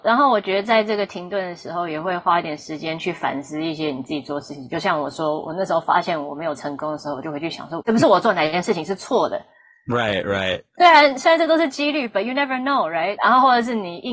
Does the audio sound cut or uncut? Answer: cut